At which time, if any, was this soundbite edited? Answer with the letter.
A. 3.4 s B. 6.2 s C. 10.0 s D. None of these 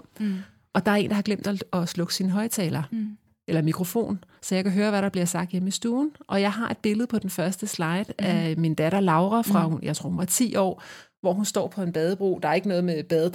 D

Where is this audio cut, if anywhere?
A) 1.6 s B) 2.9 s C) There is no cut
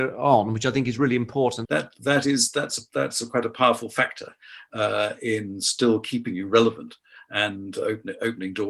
A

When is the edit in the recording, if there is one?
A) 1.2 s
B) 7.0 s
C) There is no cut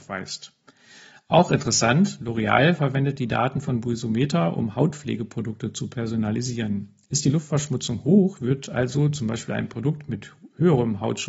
C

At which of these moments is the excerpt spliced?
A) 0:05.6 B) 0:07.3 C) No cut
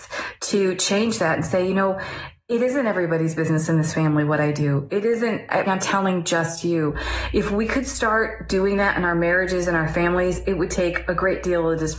A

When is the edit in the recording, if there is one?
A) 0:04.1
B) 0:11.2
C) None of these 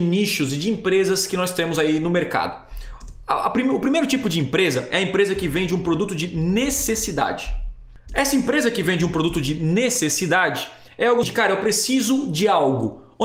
B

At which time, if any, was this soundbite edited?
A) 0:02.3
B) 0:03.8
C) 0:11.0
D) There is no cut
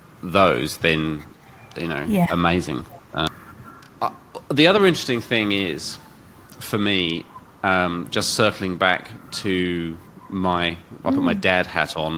D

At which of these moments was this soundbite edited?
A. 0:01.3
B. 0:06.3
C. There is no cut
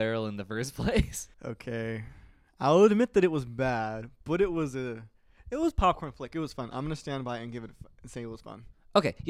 A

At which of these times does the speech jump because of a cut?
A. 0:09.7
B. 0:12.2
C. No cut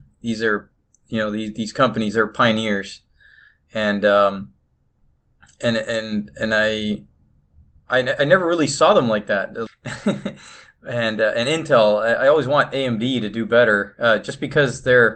A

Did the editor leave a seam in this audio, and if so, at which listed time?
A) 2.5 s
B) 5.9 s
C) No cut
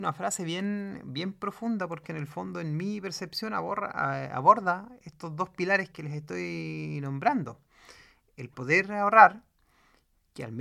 B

